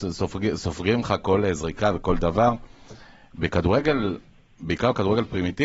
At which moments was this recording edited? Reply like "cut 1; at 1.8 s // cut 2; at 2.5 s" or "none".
none